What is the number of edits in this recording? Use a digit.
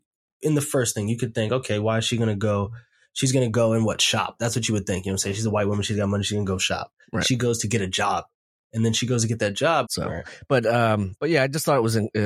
1